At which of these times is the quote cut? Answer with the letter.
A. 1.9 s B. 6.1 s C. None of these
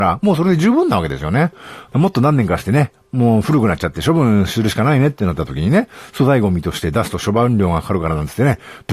A